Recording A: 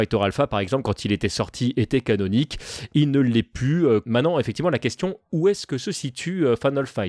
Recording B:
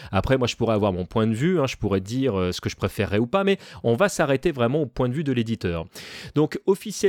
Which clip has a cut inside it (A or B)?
A